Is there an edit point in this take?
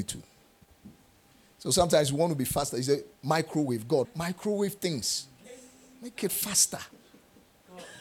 yes; 1 cut; at 4.0 s

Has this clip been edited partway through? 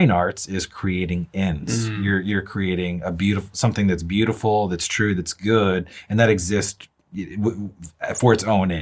no; 0 cuts

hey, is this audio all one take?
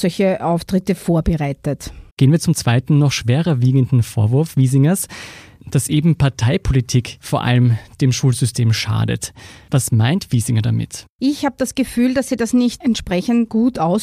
no; 2 cuts; at 2.1 s, 11.2 s

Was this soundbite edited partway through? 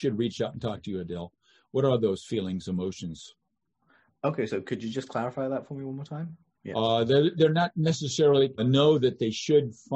yes; 2 cuts; at 6.5 s, 8.6 s

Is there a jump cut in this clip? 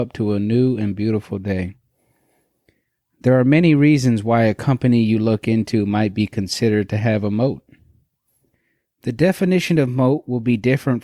no; 0 cuts

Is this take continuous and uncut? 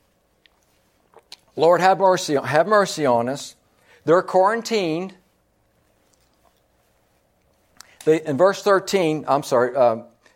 yes; 0 cuts

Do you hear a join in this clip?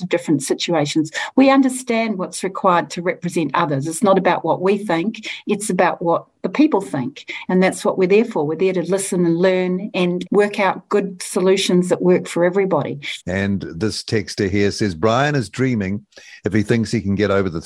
yes; 2 cuts; at 10.3 s, 13.2 s

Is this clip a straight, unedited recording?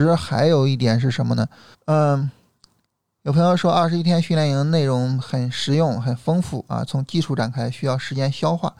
no; 1 cut; at 1.7 s

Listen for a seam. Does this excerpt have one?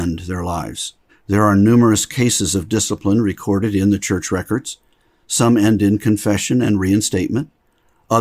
yes; 1 cut; at 1.1 s

